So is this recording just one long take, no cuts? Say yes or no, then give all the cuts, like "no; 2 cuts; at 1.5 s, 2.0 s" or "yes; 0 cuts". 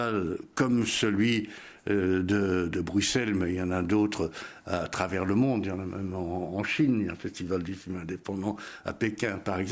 yes; 0 cuts